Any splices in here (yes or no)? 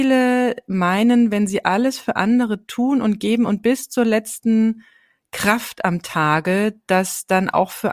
no